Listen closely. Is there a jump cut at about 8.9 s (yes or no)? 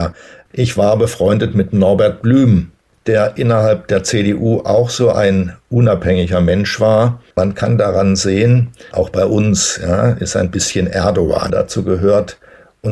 yes